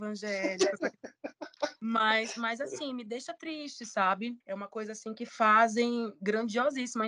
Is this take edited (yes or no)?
yes